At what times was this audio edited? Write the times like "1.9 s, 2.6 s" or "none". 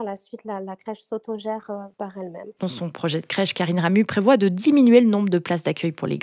2.6 s